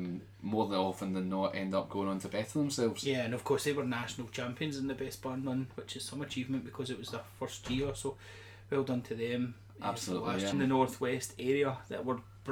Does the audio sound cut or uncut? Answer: cut